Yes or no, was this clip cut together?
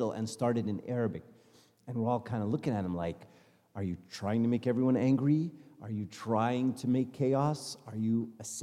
no